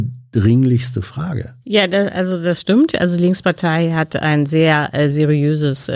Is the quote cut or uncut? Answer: cut